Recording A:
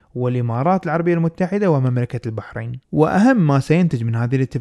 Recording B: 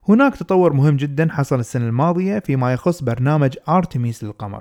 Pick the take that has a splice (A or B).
A